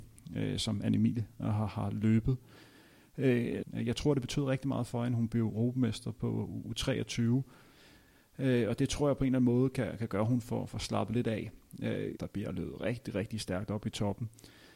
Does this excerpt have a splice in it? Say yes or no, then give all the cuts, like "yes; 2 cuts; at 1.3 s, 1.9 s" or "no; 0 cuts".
yes; 2 cuts; at 3.6 s, 12.2 s